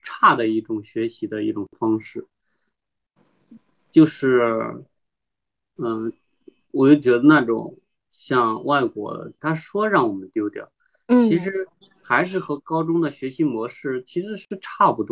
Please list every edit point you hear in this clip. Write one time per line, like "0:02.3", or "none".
0:06.7
0:09.4